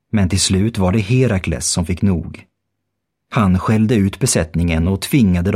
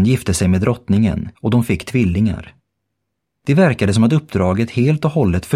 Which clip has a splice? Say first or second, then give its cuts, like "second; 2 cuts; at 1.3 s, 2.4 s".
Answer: second; 1 cut; at 1.3 s